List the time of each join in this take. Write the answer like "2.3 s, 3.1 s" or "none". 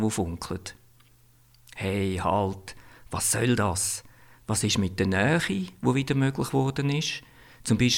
none